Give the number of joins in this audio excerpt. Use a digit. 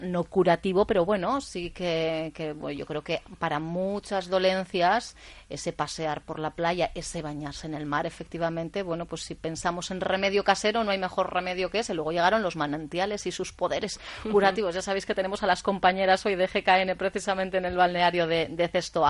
0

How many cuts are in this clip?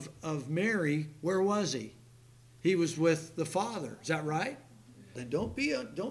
1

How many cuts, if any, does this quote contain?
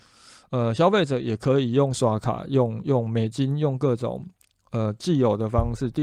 0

